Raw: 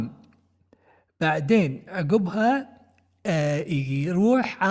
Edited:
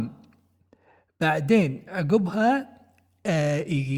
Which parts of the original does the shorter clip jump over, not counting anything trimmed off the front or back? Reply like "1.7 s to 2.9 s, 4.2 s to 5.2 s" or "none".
none